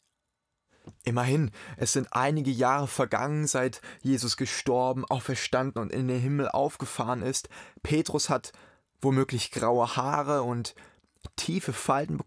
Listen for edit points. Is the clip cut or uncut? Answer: uncut